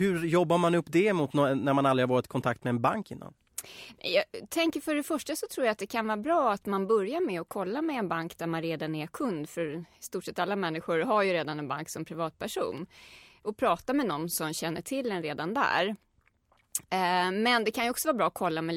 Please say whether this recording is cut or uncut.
uncut